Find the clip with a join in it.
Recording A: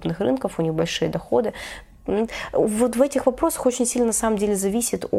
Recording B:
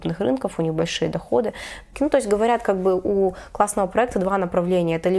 B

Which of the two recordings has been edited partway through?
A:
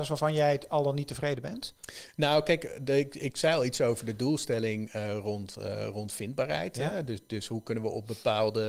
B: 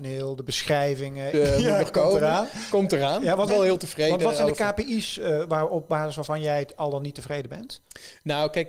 B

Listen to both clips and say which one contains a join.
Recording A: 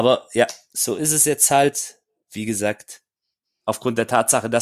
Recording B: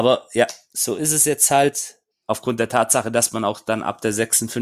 B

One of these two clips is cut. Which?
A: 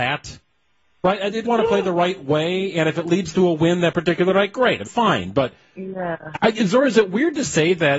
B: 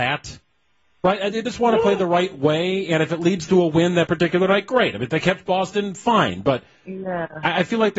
A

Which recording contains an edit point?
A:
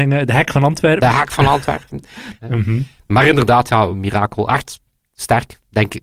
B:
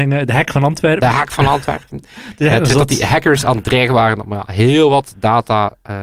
A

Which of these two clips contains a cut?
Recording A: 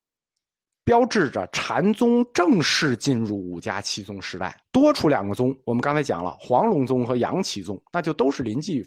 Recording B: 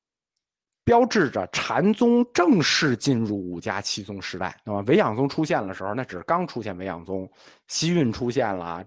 A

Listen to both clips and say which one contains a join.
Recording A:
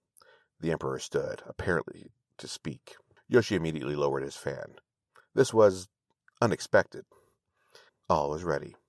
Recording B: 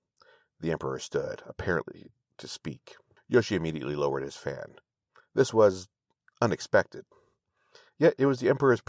A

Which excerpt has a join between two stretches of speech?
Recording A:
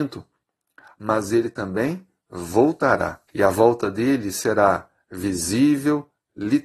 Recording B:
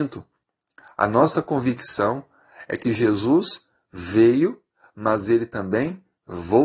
A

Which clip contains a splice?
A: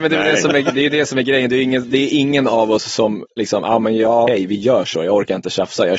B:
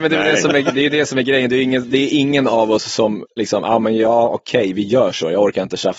A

